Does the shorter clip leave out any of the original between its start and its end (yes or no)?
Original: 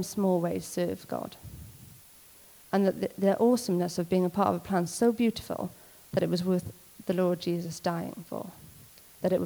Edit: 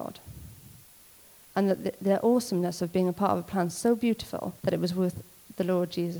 yes